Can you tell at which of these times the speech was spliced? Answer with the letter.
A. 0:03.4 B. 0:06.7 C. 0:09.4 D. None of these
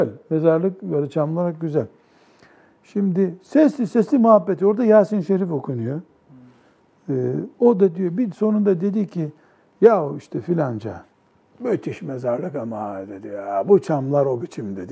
D